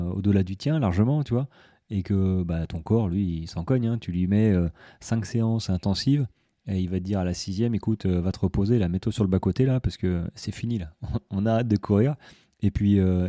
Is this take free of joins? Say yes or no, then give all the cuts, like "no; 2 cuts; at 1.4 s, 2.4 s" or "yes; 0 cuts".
yes; 0 cuts